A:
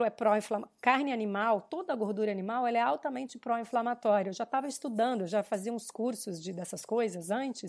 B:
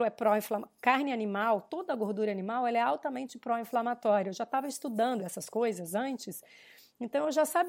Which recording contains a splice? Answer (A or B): B